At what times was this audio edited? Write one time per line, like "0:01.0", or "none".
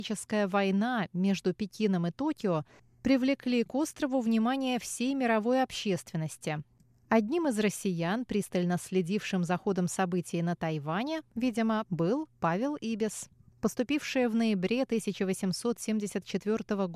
0:11.9